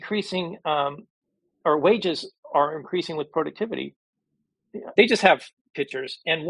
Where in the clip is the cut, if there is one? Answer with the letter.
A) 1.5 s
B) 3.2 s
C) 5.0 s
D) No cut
C